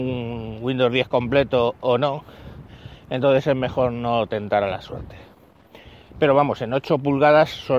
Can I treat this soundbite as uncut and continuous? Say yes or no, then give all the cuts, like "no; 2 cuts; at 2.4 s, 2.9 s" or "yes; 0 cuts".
yes; 0 cuts